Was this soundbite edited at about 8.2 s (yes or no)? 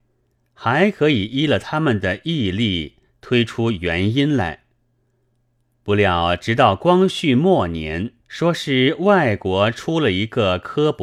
yes